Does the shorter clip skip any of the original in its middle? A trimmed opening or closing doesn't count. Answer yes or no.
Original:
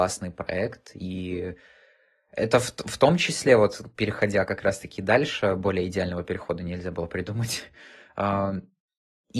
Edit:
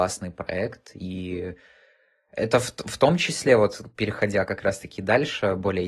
no